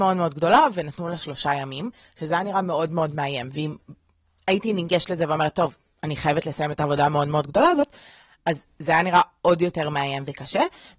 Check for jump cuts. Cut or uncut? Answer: uncut